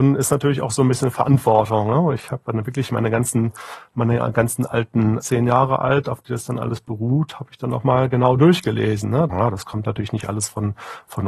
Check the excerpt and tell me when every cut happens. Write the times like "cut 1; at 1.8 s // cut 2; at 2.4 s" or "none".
cut 1; at 5.2 s // cut 2; at 9.3 s